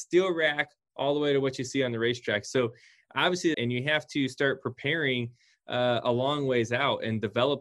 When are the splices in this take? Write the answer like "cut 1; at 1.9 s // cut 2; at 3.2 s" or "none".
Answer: cut 1; at 3.5 s

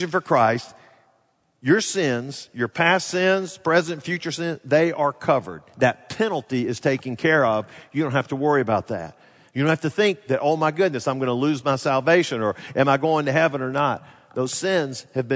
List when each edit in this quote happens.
none

